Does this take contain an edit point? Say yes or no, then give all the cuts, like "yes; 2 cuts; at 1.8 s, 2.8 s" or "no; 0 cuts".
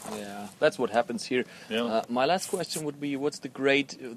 no; 0 cuts